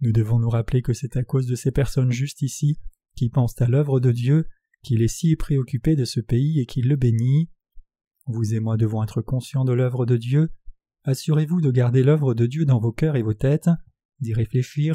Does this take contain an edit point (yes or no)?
no